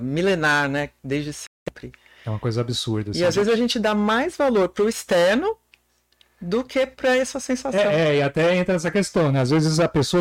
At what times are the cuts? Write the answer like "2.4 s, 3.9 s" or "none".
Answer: none

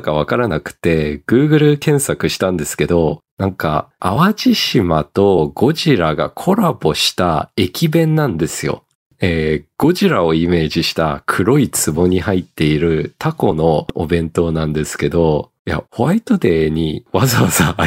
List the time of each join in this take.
4.0 s, 15.9 s

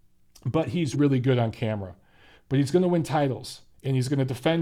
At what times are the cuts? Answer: 0.9 s, 2.3 s

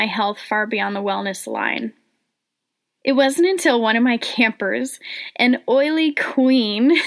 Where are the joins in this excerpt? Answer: none

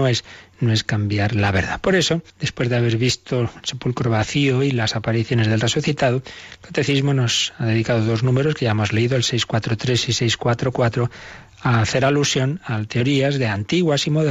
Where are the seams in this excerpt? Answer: 2.3 s

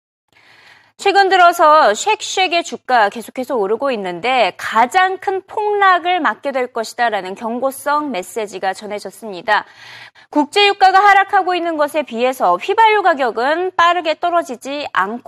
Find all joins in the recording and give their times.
10.1 s

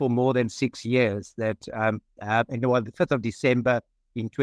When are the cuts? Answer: 2.2 s

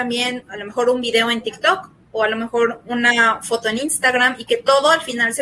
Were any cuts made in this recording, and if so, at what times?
none

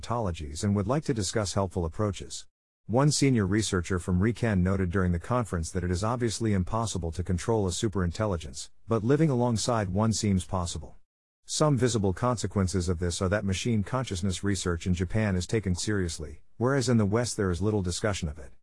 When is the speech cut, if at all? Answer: 2.7 s, 15.8 s

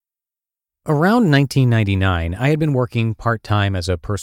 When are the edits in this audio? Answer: none

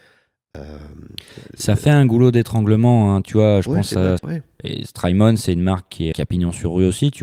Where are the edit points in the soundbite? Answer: 4.2 s, 6.1 s

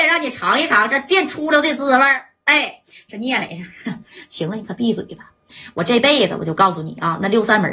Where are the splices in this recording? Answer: none

